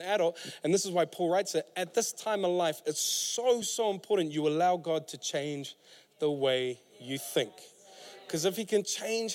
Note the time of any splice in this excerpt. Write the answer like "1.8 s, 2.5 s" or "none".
3.6 s

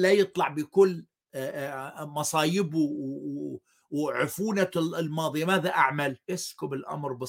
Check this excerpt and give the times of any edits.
6.2 s

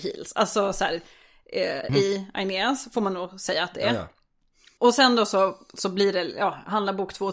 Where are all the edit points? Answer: 1.9 s

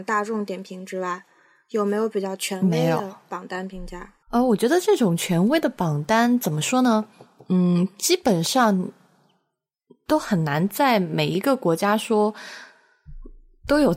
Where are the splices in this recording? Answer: 4.2 s

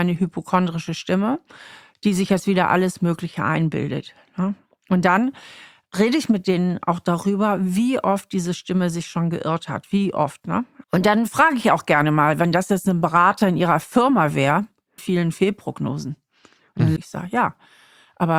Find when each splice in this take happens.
10.8 s, 15.0 s, 17.0 s

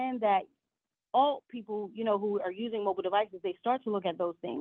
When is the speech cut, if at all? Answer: none

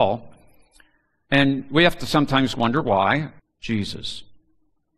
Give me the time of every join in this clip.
3.4 s

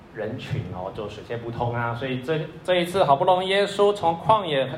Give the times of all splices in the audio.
none

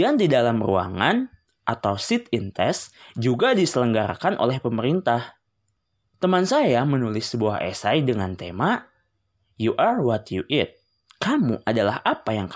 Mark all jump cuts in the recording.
none

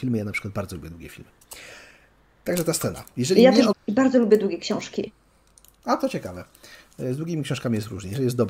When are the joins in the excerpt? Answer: 3.7 s

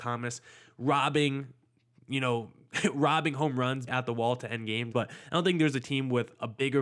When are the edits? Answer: 3.9 s, 4.9 s

